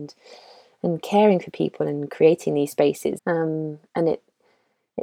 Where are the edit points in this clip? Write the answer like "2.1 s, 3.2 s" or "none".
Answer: 3.2 s